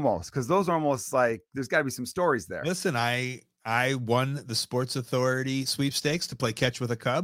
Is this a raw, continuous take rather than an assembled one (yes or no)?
yes